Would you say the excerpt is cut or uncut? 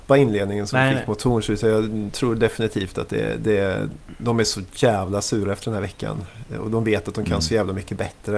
uncut